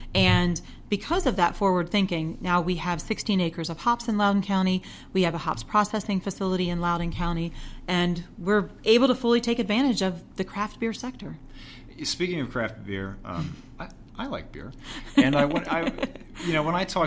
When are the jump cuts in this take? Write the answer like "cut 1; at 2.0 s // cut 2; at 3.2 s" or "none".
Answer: none